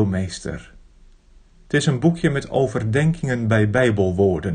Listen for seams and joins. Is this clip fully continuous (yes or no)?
no